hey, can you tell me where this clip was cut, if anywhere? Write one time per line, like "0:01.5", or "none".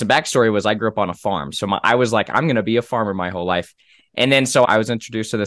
none